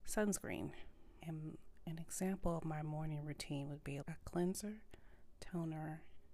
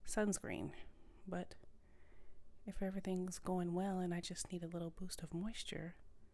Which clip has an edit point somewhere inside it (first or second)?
first